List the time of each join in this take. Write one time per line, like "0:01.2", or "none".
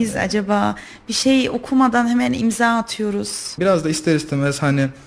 0:03.6